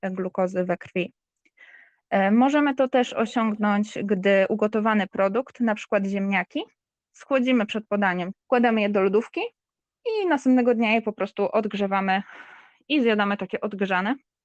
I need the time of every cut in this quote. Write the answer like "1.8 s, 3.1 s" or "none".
8.3 s